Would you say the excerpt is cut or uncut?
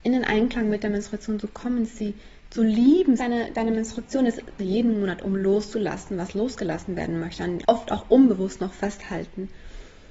cut